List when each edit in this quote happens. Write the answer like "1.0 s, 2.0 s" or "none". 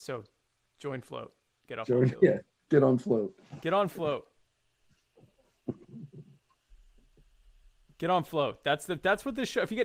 none